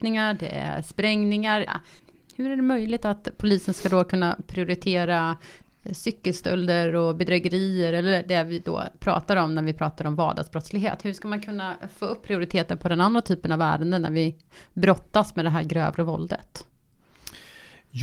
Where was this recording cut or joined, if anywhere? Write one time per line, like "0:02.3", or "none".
0:01.7